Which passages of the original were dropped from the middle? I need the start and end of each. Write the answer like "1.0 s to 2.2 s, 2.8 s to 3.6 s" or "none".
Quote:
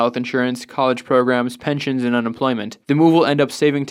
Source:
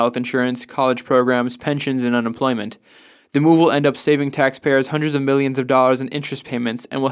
2.8 s to 3.3 s